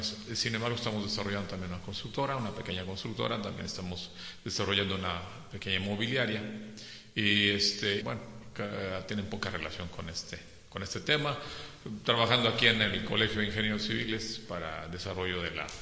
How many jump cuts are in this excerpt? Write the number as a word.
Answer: one